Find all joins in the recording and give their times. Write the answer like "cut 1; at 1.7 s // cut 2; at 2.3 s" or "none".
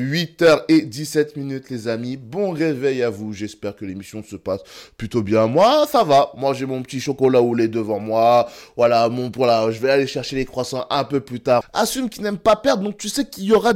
cut 1; at 11.6 s